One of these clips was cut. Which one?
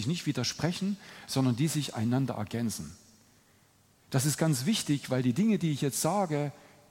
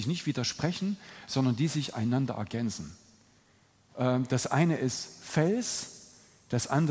second; 1 cut; at 3.9 s

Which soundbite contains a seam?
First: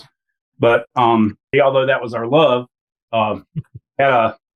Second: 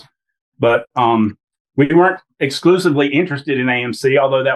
first; 2 cuts; at 1.5 s, 3.1 s

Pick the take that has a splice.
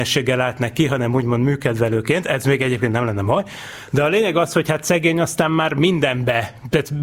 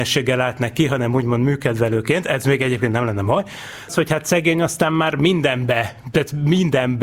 second; 1 cut; at 3.9 s

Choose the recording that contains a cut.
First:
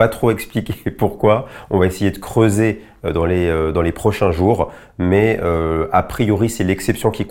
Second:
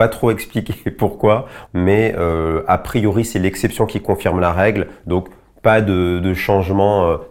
second; 1 cut; at 1.7 s

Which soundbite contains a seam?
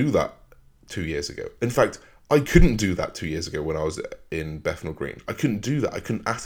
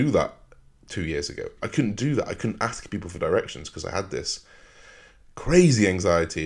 second; 1 cut; at 1.6 s

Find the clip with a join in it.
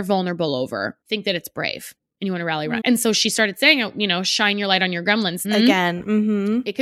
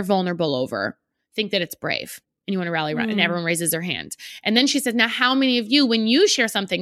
first; 3 cuts; at 1.0 s, 2.8 s, 5.4 s

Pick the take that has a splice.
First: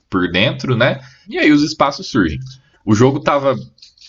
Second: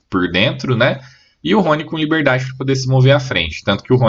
first; 2 cuts; at 1.2 s, 2.7 s

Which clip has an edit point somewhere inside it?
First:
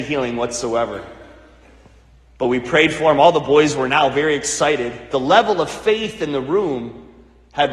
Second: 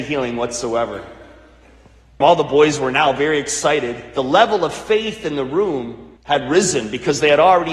second; 2 cuts; at 2.2 s, 6.2 s

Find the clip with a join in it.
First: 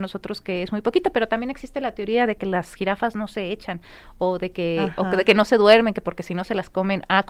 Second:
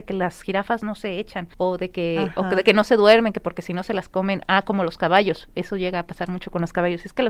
second; 1 cut; at 1.5 s

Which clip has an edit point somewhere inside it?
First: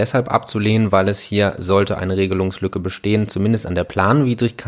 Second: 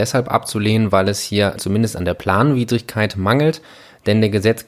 second; 1 cut; at 1.6 s

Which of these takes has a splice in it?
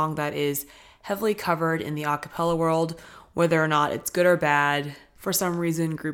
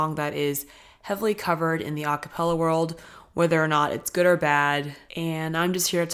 second; 1 cut; at 5.1 s

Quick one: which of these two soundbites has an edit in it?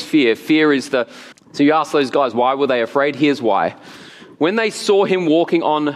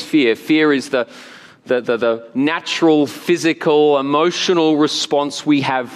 first; 1 cut; at 1.3 s

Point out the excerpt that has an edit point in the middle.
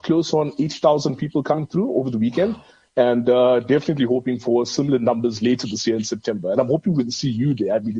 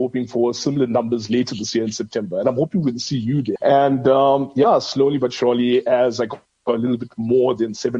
second; 1 cut; at 3.6 s

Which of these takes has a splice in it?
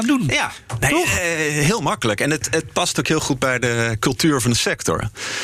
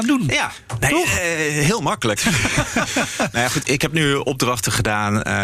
second; 2 cuts; at 2.2 s, 3.6 s

